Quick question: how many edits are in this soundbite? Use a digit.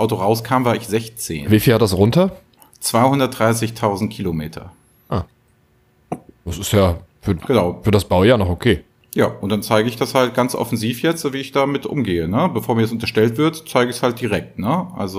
0